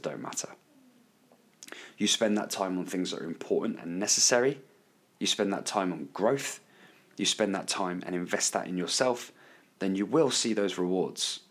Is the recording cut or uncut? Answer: uncut